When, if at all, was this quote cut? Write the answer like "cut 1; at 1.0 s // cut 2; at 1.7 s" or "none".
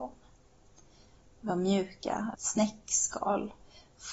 cut 1; at 2.3 s